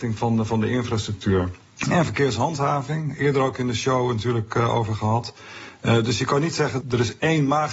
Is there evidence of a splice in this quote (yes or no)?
yes